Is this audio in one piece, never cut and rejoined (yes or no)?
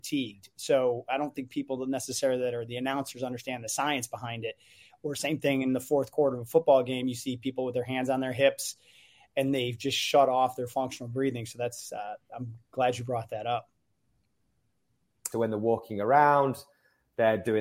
no